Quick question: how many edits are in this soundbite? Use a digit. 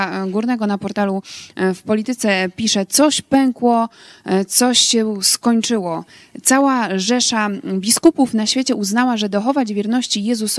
0